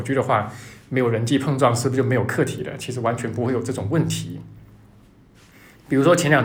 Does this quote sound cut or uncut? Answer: uncut